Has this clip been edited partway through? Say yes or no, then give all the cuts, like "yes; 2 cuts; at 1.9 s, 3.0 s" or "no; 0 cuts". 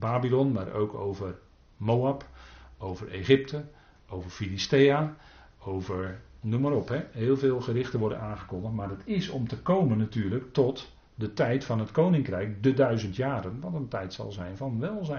no; 0 cuts